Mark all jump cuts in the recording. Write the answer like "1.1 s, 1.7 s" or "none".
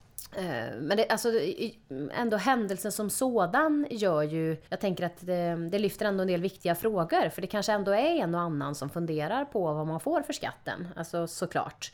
4.7 s